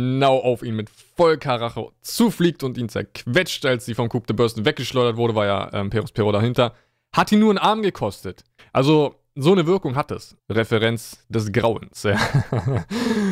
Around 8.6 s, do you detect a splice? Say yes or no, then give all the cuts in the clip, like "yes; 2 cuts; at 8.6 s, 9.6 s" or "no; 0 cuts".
yes; 2 cuts; at 8.6 s, 10.4 s